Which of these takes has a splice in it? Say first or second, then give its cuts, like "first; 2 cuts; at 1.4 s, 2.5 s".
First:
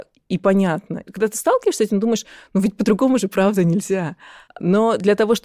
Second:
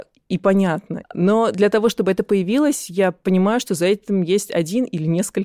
second; 1 cut; at 1.0 s